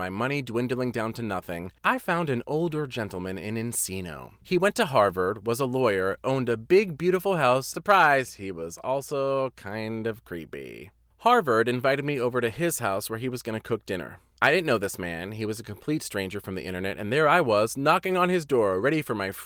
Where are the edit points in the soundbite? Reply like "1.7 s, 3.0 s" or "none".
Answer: 7.7 s